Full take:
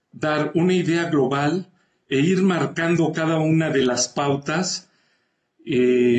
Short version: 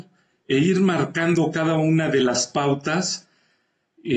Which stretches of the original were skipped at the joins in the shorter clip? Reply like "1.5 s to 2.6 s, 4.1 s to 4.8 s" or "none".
none